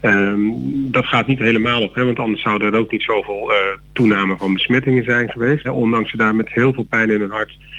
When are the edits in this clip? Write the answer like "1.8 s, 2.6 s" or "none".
5.6 s